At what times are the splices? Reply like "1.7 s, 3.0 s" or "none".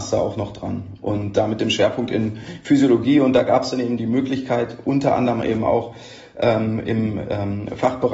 none